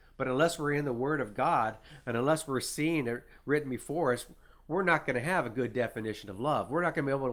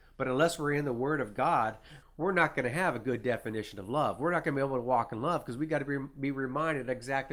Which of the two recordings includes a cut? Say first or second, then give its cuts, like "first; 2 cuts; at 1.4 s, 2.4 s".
second; 1 cut; at 2.0 s